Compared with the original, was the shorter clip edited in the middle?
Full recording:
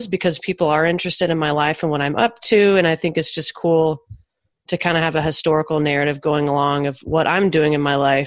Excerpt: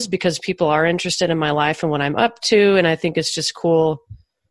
no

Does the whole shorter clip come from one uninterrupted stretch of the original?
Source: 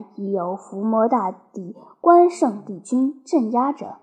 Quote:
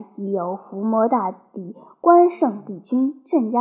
yes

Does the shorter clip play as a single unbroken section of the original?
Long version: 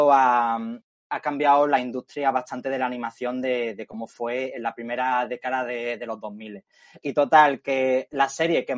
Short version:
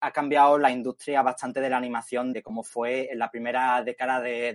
no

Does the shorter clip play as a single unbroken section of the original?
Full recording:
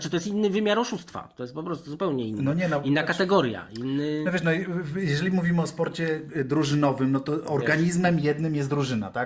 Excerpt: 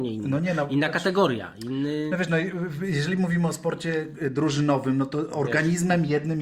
yes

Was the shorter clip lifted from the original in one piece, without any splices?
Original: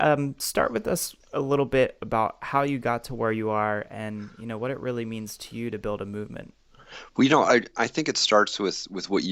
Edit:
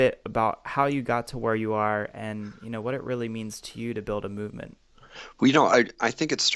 yes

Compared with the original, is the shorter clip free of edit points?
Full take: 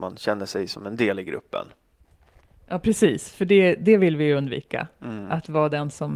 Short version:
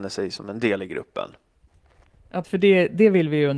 no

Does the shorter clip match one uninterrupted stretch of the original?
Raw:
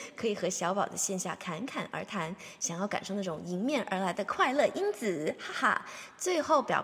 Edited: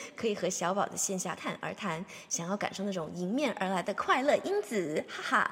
no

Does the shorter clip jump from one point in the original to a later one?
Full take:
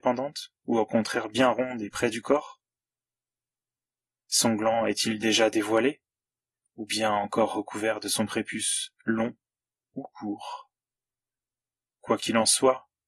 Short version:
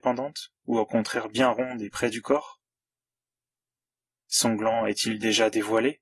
no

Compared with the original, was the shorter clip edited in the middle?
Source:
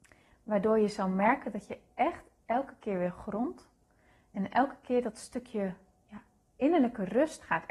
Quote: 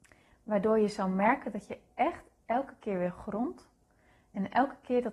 no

